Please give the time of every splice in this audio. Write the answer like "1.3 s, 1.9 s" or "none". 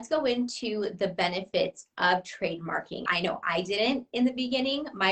3.1 s